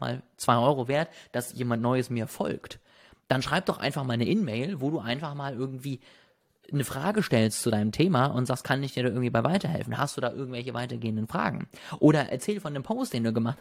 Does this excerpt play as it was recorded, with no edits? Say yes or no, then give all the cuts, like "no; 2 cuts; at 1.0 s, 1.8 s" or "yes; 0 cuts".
yes; 0 cuts